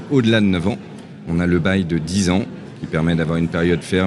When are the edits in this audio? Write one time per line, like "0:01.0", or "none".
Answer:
none